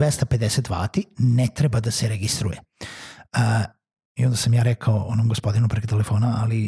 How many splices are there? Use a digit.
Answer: 0